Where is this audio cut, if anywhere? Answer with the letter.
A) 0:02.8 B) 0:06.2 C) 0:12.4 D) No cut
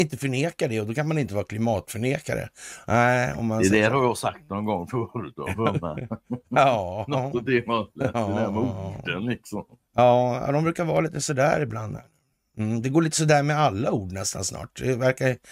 D